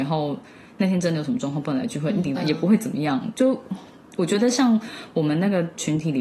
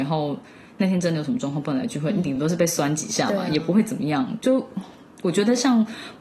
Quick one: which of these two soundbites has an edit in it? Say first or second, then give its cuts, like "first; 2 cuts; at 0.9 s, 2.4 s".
first; 1 cut; at 2.4 s